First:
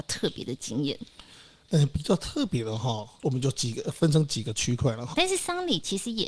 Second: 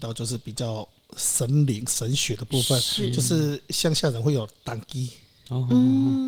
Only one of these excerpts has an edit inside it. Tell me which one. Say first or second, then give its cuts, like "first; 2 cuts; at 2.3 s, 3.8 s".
first; 2 cuts; at 3.2 s, 5.1 s